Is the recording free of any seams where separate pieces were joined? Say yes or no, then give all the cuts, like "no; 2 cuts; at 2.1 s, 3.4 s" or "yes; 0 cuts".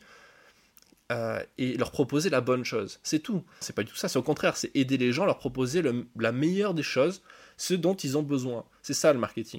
no; 1 cut; at 3.6 s